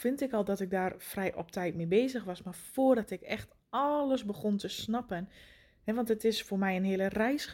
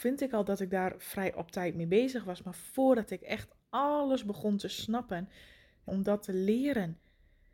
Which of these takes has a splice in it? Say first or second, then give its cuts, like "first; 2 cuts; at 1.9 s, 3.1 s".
second; 1 cut; at 5.9 s